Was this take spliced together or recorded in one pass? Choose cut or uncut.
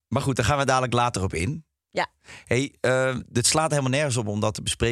uncut